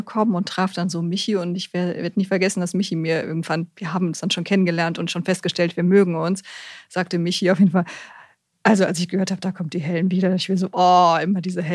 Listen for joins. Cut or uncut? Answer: uncut